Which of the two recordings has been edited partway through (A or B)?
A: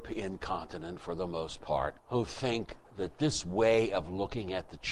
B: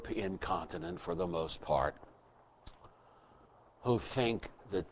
A